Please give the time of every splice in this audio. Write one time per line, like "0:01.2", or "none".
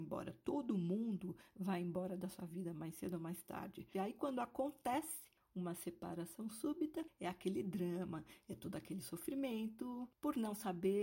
0:03.9